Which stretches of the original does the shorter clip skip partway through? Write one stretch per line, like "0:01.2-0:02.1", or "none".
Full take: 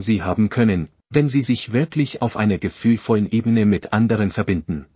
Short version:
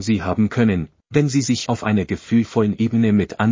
0:01.7-0:02.2